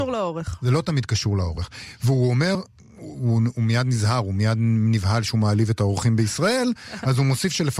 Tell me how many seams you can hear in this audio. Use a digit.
0